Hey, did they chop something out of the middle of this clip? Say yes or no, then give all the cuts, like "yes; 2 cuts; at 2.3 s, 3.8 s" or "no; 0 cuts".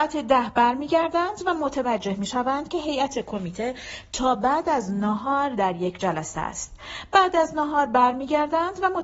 no; 0 cuts